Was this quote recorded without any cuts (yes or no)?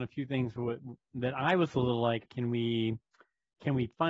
no